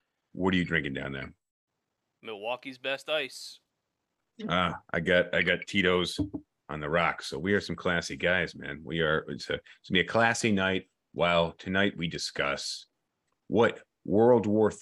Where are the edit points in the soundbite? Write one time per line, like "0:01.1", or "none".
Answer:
none